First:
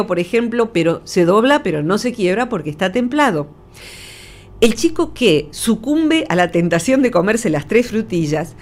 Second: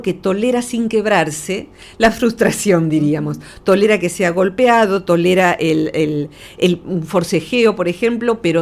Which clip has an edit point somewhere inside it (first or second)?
second